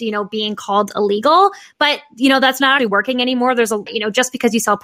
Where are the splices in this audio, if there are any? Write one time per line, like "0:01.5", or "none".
0:02.8
0:03.9